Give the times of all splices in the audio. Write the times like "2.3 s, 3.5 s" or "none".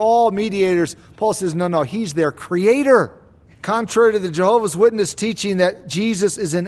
3.5 s